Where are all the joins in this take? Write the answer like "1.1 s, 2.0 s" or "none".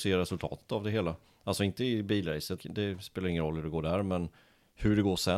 2.6 s